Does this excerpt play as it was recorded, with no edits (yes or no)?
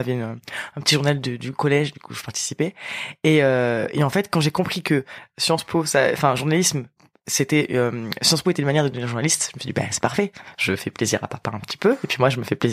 yes